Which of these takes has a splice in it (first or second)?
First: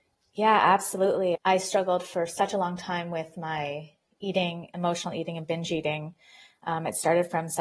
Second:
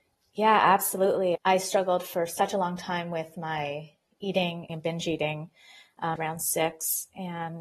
second